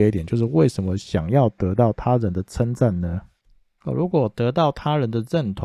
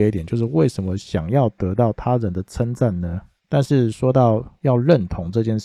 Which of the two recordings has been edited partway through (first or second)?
second